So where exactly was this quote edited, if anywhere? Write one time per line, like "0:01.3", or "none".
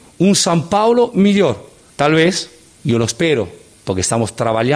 0:01.9